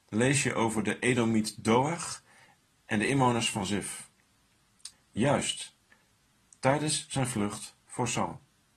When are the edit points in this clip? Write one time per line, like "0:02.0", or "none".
0:04.9